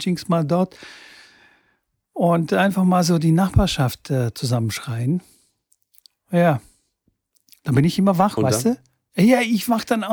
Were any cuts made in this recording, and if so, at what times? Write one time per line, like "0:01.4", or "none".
none